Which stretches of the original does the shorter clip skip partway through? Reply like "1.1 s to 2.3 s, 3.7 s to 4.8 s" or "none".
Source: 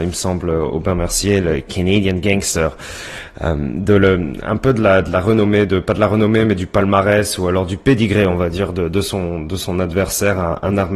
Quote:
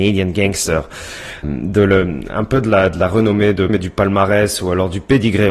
3.3 s to 3.6 s, 5.8 s to 6.5 s